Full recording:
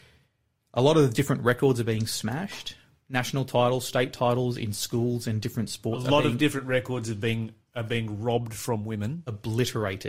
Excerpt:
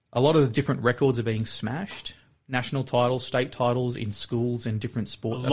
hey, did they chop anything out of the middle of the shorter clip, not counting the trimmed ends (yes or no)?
no